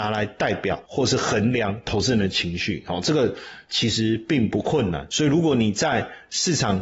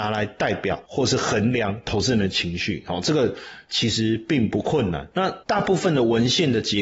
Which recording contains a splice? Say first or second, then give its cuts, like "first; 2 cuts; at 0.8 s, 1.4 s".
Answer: first; 1 cut; at 5.1 s